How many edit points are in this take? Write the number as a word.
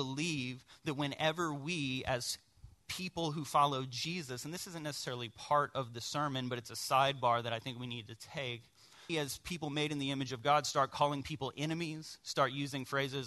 one